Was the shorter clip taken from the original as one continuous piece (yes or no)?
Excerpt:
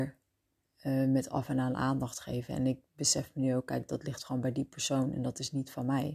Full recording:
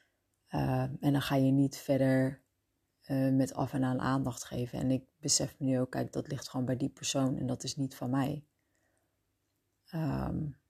yes